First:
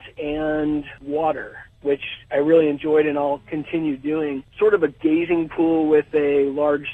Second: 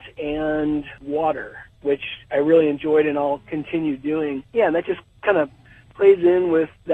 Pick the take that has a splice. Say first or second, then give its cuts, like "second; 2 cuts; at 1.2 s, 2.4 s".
second; 1 cut; at 4.4 s